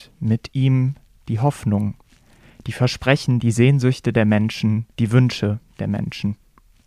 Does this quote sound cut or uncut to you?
cut